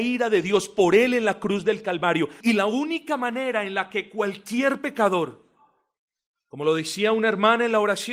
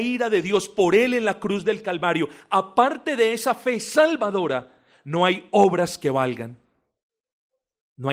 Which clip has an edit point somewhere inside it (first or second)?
first